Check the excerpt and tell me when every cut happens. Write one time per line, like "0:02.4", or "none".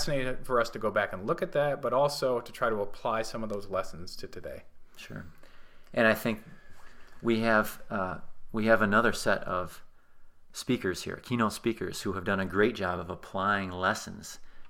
none